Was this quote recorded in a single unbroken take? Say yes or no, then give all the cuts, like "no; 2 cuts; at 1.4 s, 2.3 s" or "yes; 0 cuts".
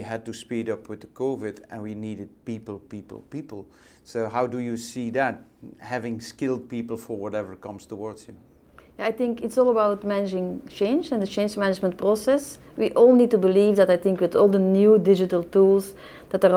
yes; 0 cuts